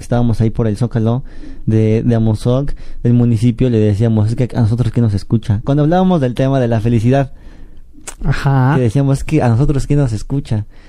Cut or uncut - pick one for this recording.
uncut